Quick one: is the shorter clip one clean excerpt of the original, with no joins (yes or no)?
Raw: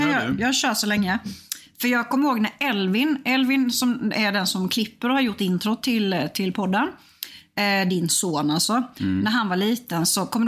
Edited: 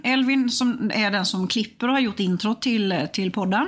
yes